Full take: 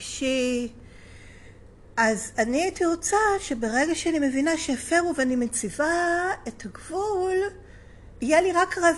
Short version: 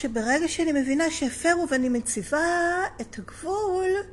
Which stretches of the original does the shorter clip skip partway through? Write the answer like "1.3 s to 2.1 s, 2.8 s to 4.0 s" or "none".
none